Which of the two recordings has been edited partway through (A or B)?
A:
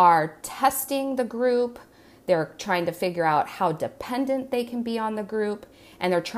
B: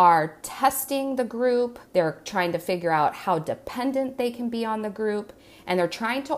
B